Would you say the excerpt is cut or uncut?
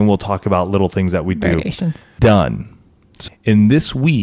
cut